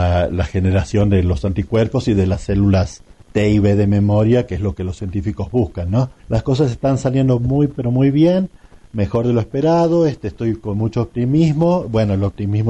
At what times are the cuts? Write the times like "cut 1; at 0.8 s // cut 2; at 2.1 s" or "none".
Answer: cut 1; at 6.2 s